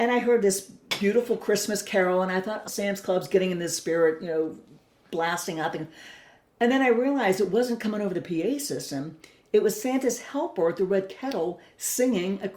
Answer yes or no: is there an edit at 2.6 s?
yes